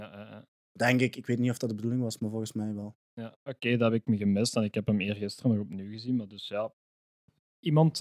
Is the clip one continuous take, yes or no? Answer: yes